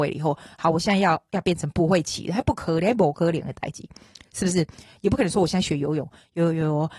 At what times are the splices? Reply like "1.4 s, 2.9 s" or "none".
none